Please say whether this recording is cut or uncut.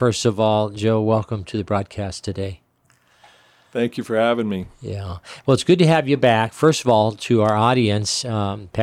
uncut